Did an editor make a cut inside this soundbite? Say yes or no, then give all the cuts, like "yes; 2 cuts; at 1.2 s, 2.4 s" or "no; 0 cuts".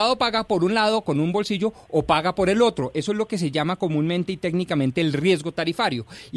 no; 0 cuts